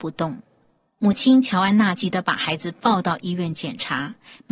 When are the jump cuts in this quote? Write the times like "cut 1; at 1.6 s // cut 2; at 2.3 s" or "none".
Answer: cut 1; at 2.0 s